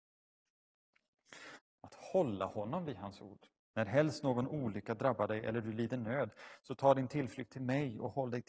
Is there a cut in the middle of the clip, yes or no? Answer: yes